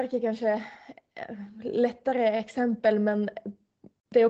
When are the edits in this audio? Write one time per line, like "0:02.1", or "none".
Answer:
none